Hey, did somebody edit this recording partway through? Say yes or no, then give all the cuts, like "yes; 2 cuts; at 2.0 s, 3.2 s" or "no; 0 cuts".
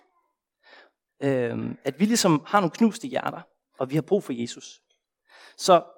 yes; 2 cuts; at 1.1 s, 3.8 s